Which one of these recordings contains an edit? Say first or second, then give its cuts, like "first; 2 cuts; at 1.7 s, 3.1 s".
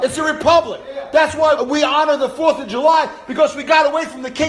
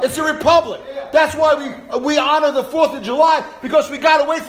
first; 1 cut; at 1.6 s